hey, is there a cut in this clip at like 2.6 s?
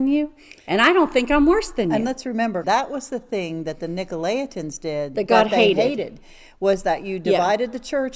yes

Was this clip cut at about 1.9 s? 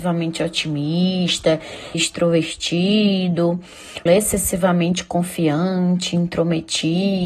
yes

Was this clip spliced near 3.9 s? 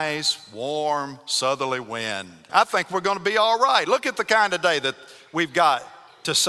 no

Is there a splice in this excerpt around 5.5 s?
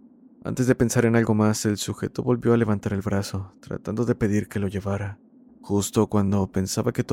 yes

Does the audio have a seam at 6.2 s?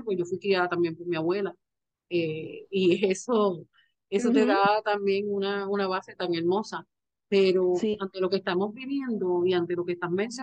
yes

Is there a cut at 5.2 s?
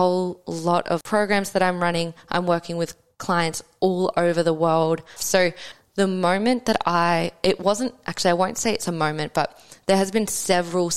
yes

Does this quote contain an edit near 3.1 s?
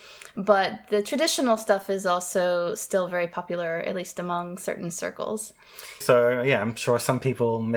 no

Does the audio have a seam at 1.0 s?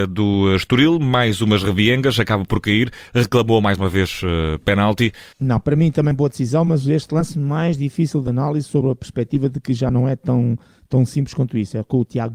no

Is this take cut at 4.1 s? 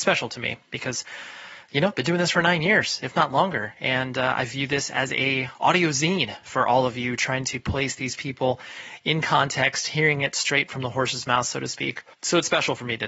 no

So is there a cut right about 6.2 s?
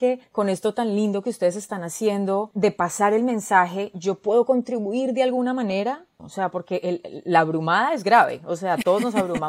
yes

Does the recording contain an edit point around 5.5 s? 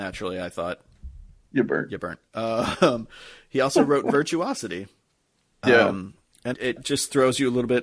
yes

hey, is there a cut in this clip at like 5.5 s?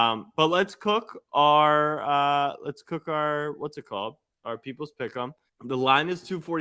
yes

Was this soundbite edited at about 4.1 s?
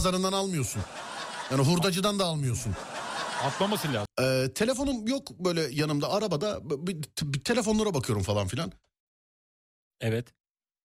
yes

